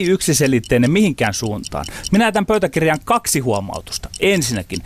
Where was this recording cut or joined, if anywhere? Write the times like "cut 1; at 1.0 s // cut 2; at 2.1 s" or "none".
cut 1; at 2.1 s

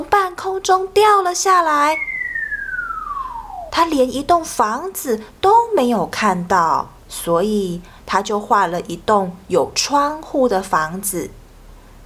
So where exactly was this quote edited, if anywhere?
cut 1; at 3.7 s // cut 2; at 7.0 s

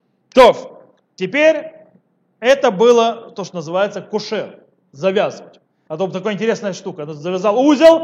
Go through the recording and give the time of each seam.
cut 1; at 5.9 s

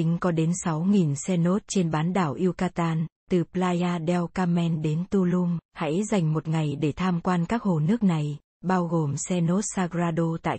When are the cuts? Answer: cut 1; at 3.2 s // cut 2; at 5.6 s

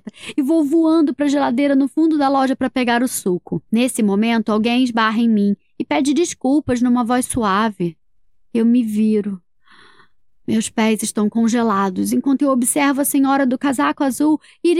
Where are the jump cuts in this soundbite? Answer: cut 1; at 3.7 s

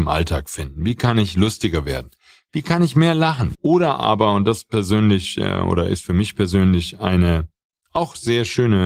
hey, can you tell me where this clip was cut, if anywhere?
cut 1; at 3.5 s

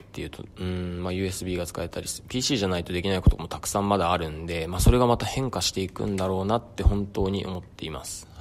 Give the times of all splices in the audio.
none

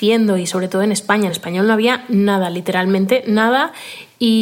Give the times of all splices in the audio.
none

